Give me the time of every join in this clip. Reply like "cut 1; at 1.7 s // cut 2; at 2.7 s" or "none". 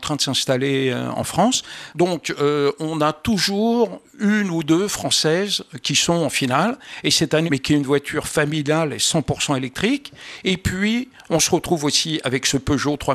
cut 1; at 1.9 s // cut 2; at 7.5 s